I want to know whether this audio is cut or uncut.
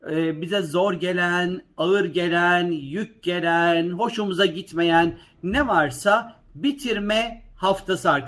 uncut